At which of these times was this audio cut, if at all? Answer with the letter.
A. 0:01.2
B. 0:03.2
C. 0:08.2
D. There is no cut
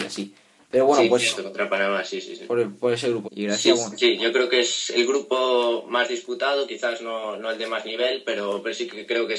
B